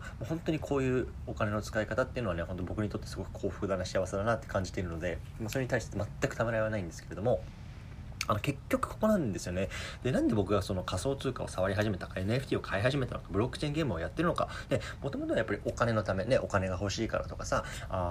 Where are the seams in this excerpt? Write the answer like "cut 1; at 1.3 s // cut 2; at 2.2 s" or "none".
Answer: none